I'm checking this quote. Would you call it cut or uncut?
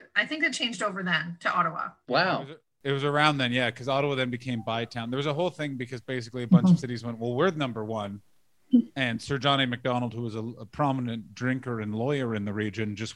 uncut